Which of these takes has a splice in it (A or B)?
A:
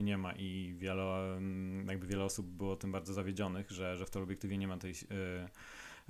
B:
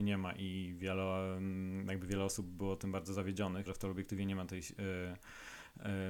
B